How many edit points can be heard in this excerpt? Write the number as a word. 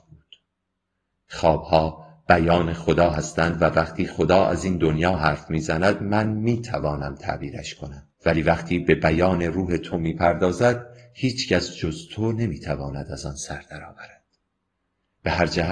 two